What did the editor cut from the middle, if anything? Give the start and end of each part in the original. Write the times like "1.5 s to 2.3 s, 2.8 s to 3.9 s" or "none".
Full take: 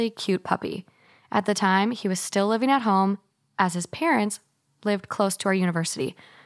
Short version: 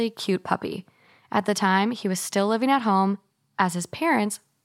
none